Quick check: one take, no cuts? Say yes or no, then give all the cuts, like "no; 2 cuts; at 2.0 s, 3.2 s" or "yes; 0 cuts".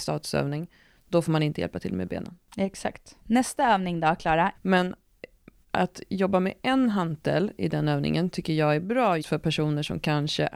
no; 2 cuts; at 4.5 s, 9.2 s